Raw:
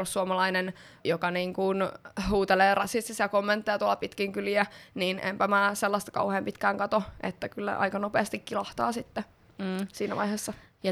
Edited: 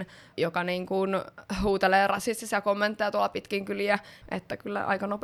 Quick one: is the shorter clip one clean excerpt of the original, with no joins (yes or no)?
no